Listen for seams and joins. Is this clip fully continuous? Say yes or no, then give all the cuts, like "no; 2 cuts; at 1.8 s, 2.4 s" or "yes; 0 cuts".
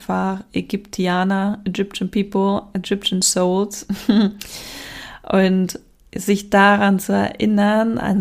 yes; 0 cuts